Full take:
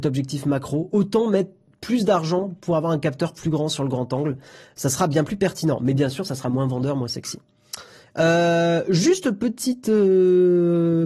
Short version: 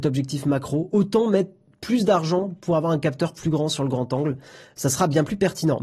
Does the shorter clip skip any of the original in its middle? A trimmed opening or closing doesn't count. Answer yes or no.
no